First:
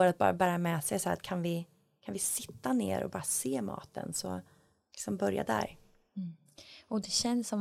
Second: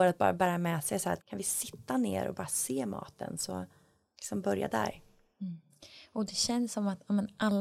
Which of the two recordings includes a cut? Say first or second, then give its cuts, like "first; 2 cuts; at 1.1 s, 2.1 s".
second; 1 cut; at 1.2 s